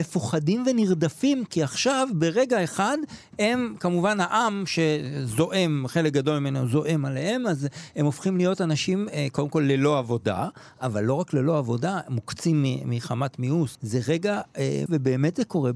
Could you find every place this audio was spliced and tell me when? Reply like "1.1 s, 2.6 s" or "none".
13.7 s, 14.9 s